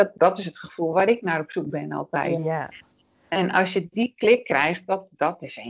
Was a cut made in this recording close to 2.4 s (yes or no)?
yes